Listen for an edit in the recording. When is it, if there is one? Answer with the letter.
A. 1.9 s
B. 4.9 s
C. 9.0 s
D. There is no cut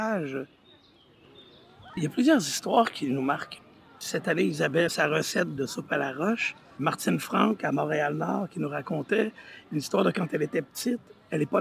B